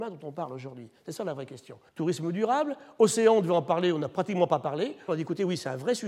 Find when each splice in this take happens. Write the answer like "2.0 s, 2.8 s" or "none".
1.9 s, 5.1 s